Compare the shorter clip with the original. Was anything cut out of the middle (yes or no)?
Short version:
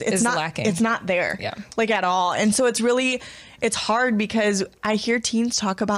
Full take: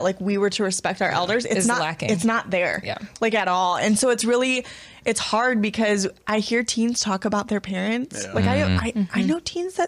no